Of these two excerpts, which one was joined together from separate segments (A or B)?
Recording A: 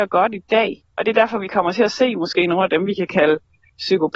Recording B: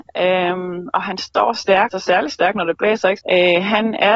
B